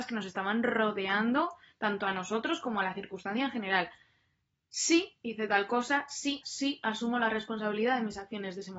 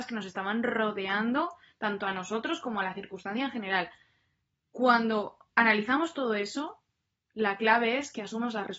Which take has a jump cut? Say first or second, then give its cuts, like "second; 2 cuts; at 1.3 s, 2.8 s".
first; 2 cuts; at 4.6 s, 6.4 s